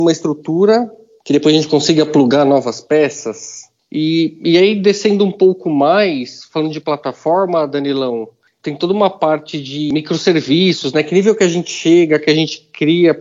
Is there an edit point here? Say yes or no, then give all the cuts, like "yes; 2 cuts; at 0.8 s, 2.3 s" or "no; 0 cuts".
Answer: no; 0 cuts